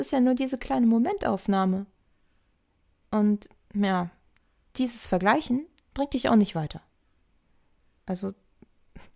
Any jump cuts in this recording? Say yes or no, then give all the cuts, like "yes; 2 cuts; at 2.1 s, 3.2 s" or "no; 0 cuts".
no; 0 cuts